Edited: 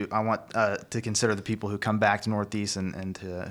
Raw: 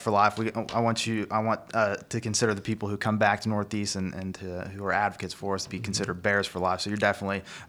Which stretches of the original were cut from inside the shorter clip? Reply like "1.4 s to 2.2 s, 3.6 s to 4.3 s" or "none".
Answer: none